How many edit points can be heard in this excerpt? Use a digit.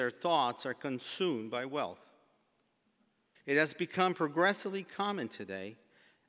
1